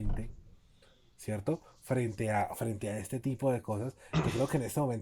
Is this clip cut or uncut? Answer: uncut